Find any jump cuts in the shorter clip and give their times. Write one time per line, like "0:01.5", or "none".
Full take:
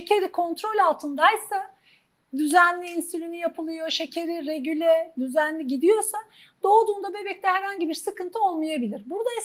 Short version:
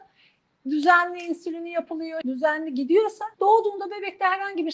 0:02.2
0:03.3